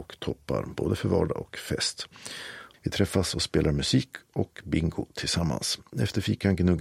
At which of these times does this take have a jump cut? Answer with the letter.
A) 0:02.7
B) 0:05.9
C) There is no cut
A